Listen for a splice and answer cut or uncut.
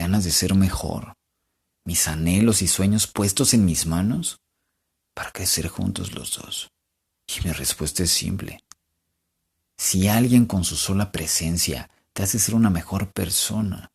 cut